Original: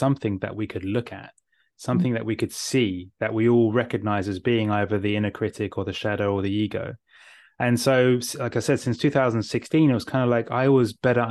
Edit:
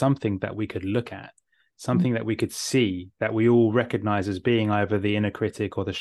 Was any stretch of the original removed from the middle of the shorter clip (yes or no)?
no